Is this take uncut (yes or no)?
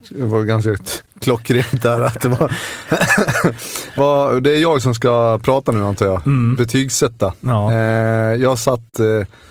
no